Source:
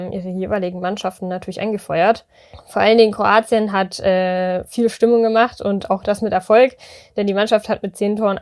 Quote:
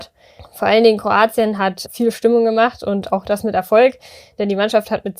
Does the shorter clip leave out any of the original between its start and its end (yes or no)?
yes